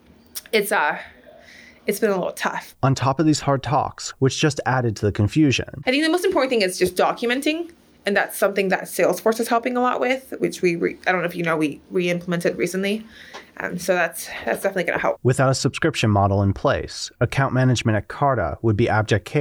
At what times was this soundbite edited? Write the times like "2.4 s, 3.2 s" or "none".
4.1 s